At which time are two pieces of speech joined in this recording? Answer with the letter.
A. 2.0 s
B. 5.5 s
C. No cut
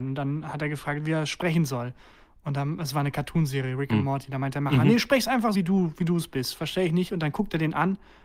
B